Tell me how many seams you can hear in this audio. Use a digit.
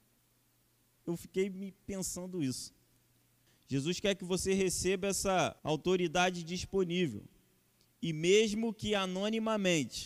3